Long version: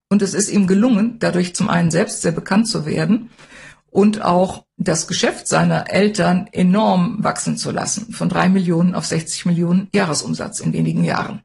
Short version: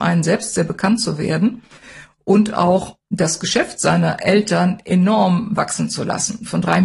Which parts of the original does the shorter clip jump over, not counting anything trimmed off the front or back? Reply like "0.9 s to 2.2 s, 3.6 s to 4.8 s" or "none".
none